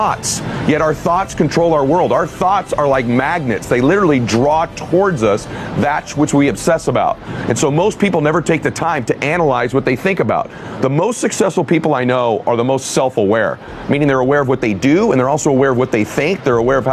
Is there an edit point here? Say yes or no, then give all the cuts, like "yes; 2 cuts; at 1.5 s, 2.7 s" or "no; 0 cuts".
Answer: no; 0 cuts